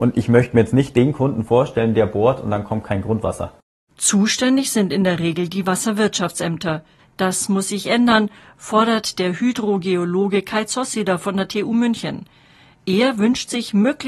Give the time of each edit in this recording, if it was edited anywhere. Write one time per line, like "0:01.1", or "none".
0:07.0